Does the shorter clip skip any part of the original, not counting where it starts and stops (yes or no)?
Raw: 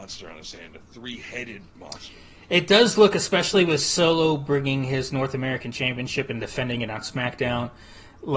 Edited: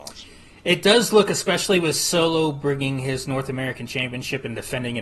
no